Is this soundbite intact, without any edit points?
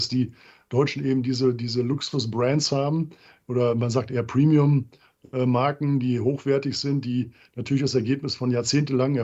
yes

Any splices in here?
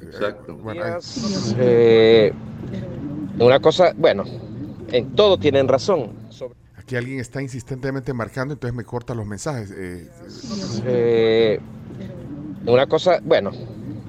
yes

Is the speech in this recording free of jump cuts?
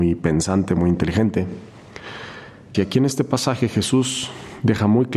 no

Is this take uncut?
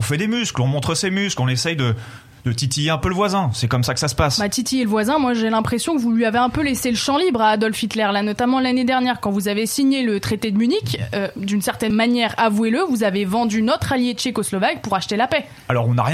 yes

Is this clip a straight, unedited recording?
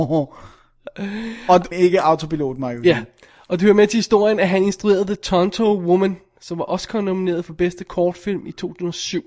no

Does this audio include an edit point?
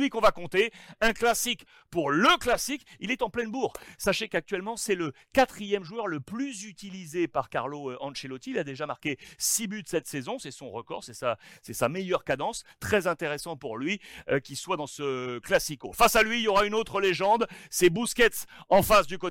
no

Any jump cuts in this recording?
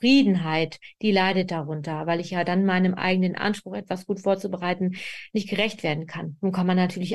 no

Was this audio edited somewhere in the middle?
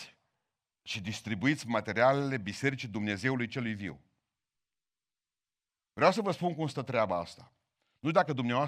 no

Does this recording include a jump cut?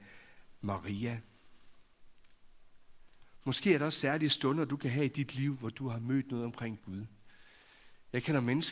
no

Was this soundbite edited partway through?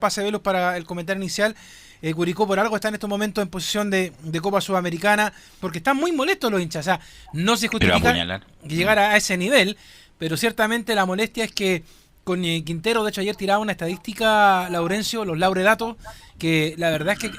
yes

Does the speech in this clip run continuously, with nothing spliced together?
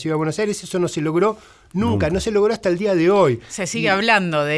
yes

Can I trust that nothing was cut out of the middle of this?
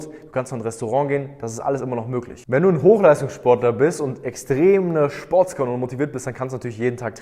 yes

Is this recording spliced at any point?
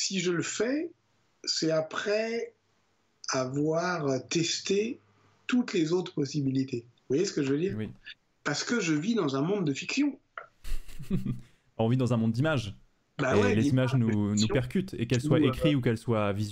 yes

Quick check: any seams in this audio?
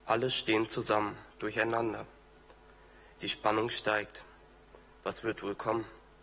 yes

